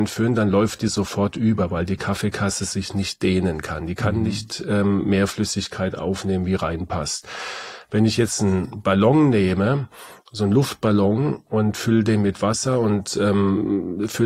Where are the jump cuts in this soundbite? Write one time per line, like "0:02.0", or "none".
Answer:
none